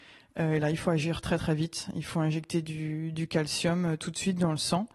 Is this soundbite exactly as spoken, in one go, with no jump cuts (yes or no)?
yes